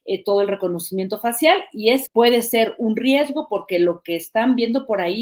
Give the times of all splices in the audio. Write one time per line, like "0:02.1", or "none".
0:02.1